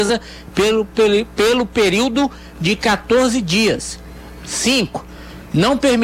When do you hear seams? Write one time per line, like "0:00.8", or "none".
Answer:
0:04.4